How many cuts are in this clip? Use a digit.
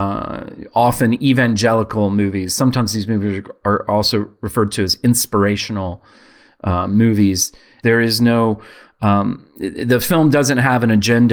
1